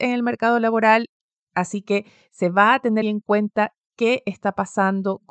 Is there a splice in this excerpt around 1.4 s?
no; 1 cut; at 3.0 s

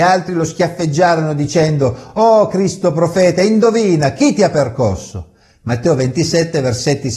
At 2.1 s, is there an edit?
no; 0 cuts

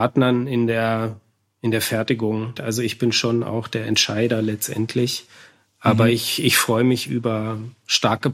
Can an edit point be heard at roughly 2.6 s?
yes; 1 cut; at 2.6 s

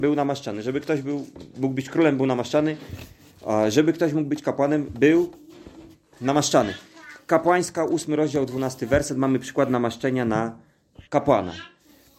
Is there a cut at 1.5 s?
no; 1 cut; at 11.1 s

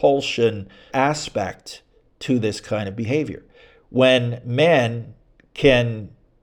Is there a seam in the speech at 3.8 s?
no; 1 cut; at 0.9 s

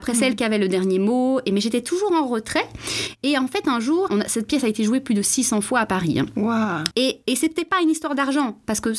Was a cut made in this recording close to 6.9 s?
yes; 2 cuts; at 4.1 s, 6.9 s

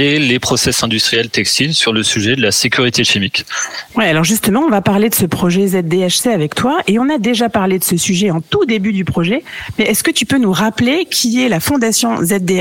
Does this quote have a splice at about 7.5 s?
no; 1 cut; at 3.9 s

